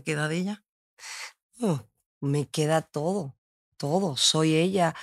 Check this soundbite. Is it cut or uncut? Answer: uncut